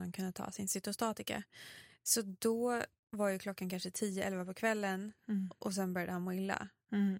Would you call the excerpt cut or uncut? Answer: uncut